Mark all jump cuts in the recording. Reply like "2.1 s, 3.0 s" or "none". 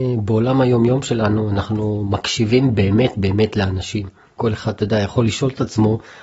none